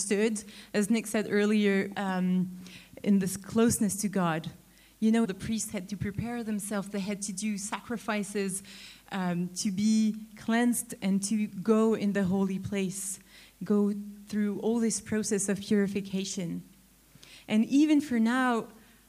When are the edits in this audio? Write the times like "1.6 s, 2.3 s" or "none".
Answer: 1.9 s, 5.2 s